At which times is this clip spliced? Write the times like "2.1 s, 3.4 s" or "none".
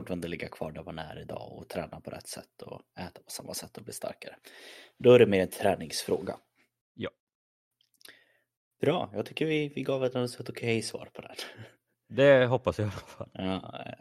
none

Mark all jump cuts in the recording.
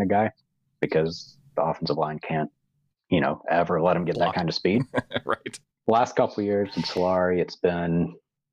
none

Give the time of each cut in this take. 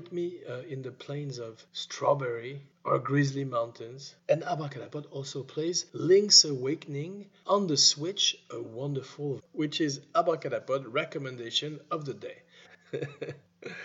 9.4 s, 12.7 s

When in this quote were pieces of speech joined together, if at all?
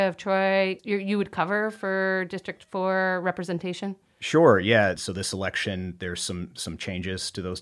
5.0 s

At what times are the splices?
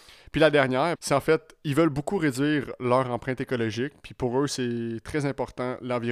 1.0 s

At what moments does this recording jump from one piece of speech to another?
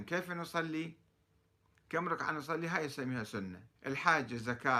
3.8 s

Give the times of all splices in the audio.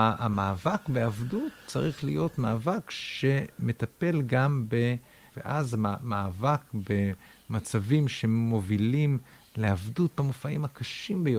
5.3 s

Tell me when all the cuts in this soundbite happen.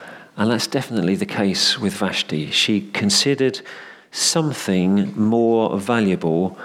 none

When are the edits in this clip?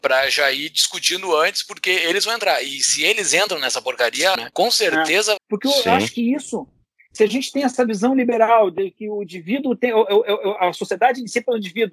4.4 s, 5.4 s

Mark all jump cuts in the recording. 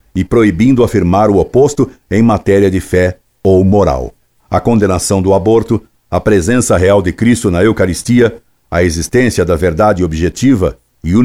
none

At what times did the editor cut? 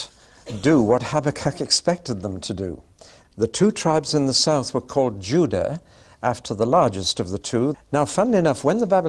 3.2 s, 7.7 s

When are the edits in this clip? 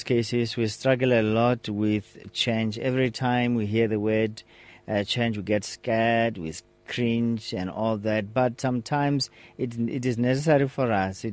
none

